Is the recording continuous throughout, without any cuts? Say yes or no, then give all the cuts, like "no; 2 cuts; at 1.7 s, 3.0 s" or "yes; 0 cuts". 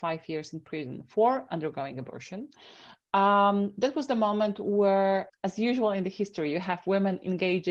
no; 1 cut; at 5.3 s